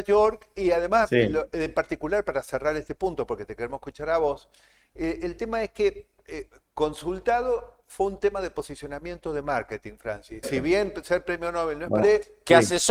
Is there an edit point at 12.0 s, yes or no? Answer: yes